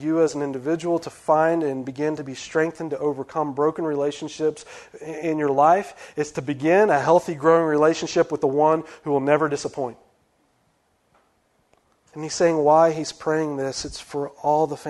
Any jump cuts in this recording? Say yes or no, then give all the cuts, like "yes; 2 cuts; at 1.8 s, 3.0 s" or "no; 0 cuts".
yes; 1 cut; at 12.1 s